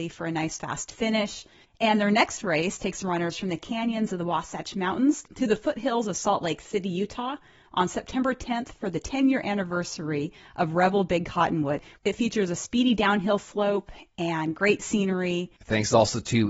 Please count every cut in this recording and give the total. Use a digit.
1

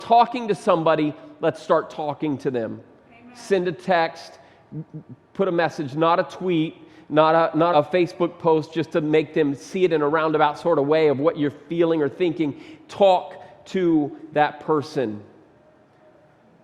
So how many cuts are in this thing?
1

